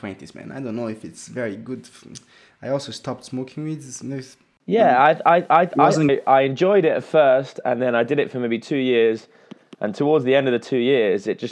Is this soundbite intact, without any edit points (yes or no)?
no